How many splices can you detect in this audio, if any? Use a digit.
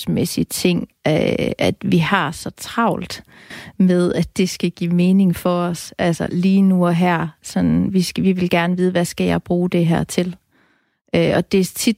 0